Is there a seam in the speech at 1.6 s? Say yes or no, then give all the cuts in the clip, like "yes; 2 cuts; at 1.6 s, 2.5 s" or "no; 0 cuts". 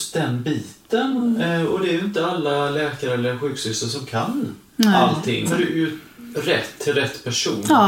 no; 1 cut; at 5.4 s